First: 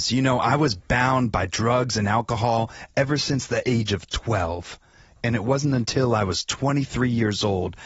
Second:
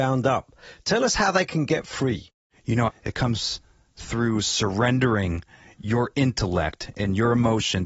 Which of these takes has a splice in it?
second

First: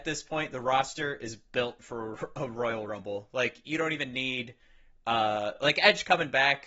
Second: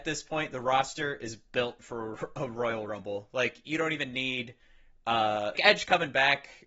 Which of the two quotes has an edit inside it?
second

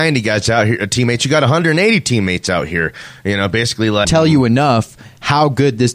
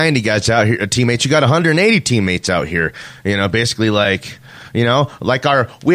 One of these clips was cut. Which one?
first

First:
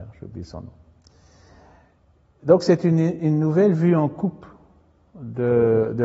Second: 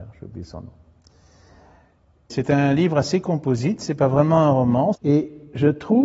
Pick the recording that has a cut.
second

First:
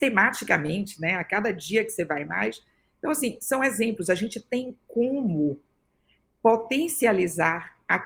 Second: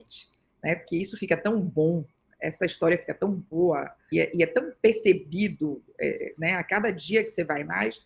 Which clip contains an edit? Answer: second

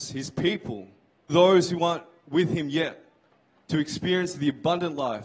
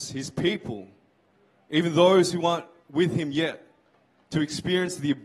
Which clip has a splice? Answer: first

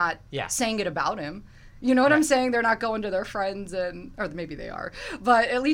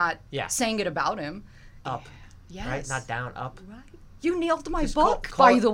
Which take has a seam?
second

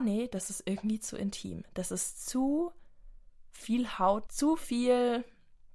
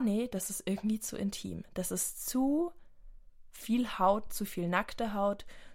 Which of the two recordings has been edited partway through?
first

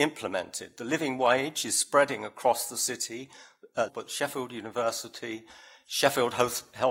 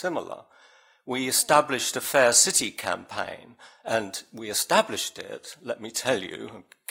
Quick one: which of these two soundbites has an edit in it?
first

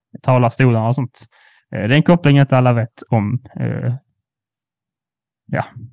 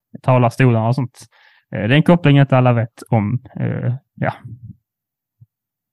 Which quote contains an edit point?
second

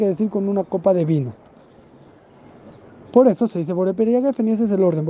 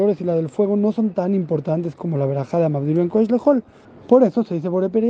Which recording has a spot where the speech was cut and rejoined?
second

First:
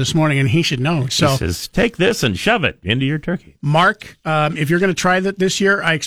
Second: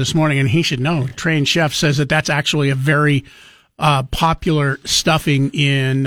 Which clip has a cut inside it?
first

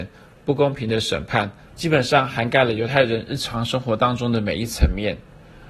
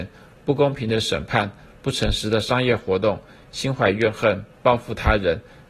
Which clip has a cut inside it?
first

